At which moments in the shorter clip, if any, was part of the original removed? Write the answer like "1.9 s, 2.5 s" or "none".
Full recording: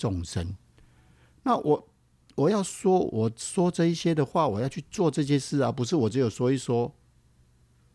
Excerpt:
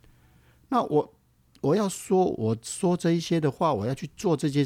none